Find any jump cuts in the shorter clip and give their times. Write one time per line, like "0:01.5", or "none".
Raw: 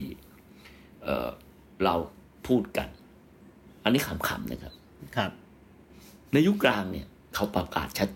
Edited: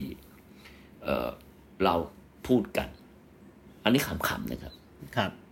none